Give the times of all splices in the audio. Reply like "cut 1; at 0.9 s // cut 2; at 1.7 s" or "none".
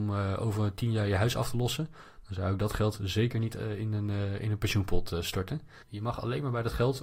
cut 1; at 5.8 s